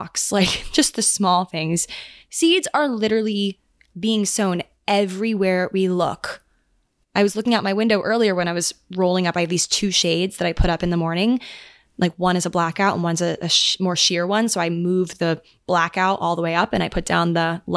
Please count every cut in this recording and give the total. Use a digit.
0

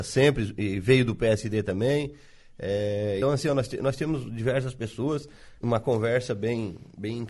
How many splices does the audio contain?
2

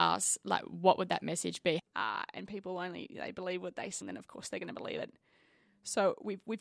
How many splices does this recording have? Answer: 2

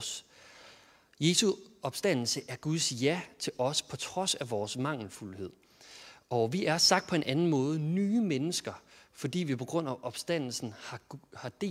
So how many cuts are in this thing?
0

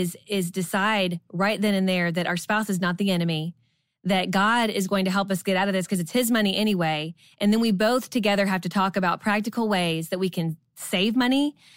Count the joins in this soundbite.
0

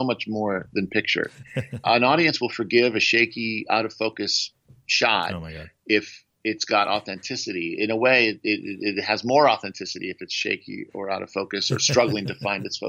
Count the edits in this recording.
1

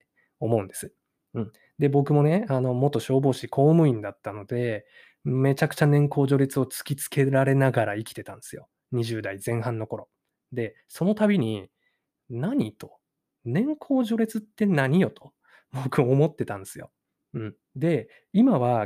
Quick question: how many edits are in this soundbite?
0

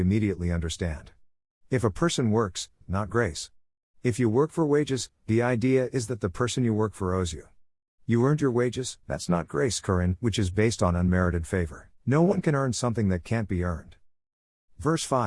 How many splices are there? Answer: 3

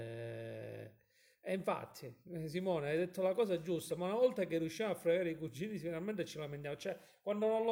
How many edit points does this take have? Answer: 0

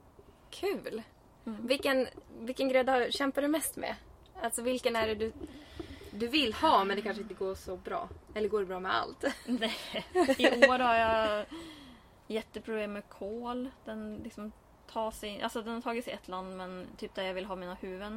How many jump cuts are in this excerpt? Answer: 0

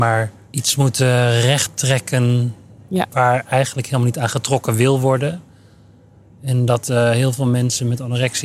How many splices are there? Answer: 0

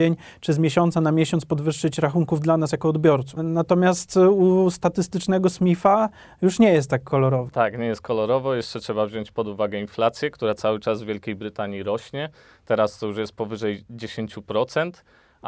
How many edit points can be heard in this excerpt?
1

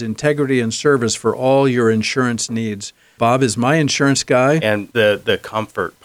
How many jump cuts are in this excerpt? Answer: 1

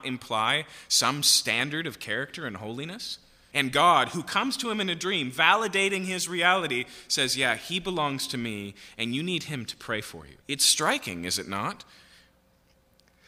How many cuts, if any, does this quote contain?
2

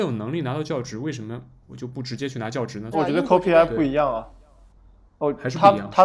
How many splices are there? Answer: 1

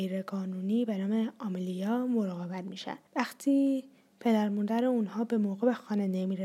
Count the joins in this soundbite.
1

